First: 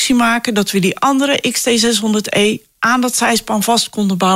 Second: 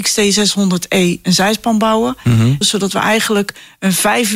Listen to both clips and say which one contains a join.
second; 1 cut; at 2.6 s

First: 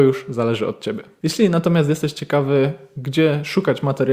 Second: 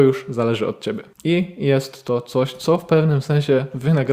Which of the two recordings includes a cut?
second; 1 cut; at 1.1 s

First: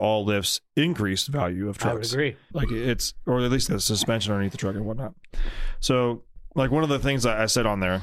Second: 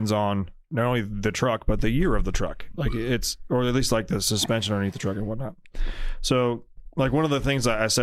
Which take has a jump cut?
first; 2 cuts; at 2.5 s, 3.7 s

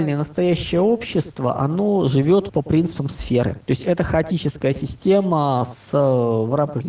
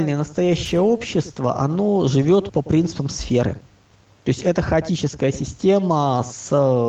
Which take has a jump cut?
first; 1 cut; at 3.6 s

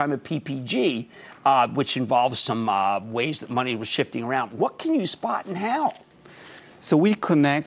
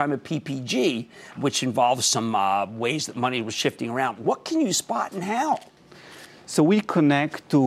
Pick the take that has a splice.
second; 1 cut; at 1.4 s

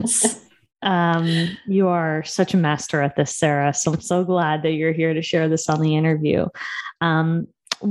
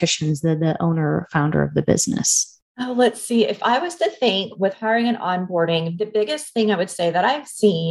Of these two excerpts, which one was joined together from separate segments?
second; 1 cut; at 6.0 s

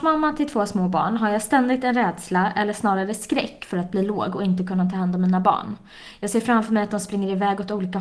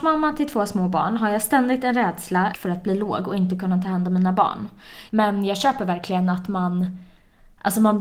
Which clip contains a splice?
second; 2 cuts; at 2.5 s, 5.1 s

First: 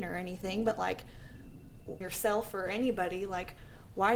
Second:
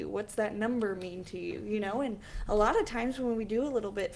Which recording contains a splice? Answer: first; 1 cut; at 2.0 s

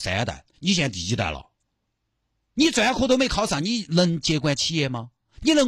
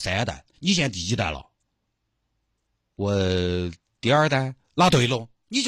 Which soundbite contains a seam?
first; 1 cut; at 2.6 s

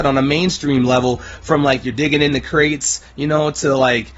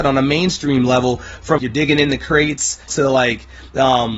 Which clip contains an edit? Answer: second; 2 cuts; at 1.6 s, 2.9 s

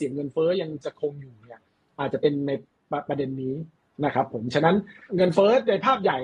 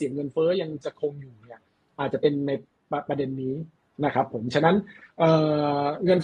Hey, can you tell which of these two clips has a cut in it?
first; 1 cut; at 5.1 s

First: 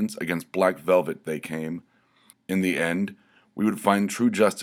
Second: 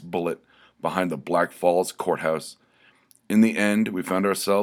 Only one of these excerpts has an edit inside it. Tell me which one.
first; 1 cut; at 2.3 s

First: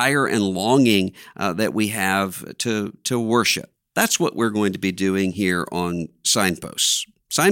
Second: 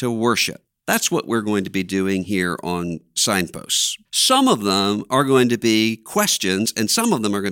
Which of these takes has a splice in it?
second; 1 cut; at 4.0 s

